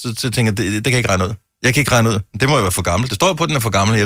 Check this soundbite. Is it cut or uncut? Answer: uncut